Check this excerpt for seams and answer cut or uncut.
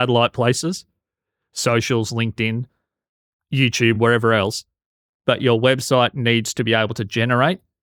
uncut